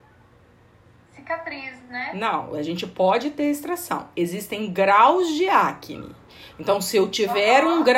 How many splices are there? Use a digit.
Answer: 0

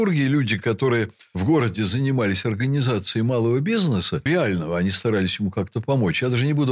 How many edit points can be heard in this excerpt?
1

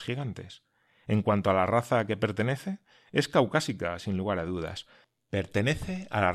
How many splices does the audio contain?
0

